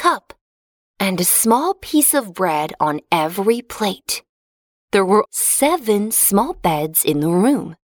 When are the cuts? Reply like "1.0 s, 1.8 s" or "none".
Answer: 5.3 s